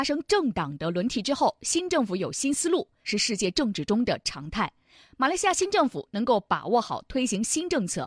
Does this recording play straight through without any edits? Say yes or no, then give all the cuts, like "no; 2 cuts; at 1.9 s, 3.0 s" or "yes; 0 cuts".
no; 1 cut; at 3.0 s